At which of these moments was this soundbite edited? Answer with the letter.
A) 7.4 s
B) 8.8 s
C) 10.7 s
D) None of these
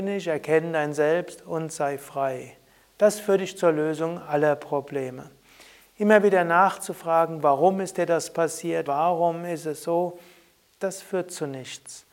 B